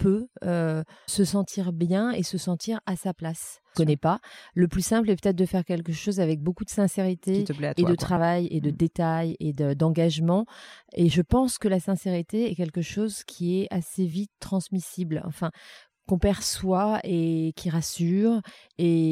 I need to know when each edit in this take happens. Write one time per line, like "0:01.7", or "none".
0:01.1
0:03.7